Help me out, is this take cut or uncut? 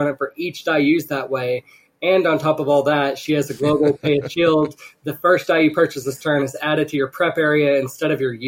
uncut